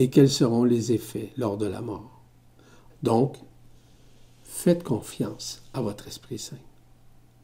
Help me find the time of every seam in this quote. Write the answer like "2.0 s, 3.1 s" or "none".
2.9 s